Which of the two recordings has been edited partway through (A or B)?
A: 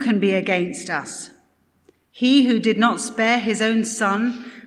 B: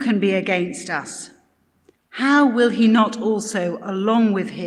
B